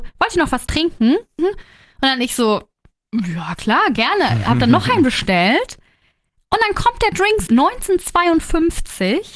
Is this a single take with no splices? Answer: no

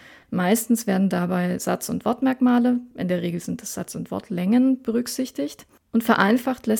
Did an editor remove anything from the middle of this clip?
no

